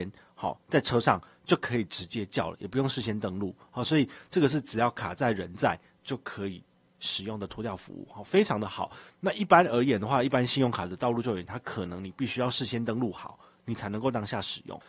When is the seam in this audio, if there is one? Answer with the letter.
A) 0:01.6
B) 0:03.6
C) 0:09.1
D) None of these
C